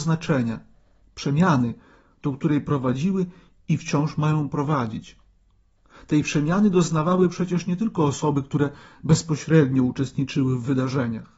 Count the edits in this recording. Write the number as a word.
zero